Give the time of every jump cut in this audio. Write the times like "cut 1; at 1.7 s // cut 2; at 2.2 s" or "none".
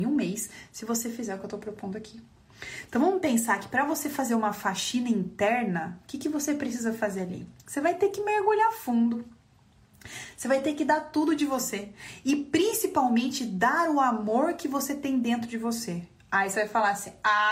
none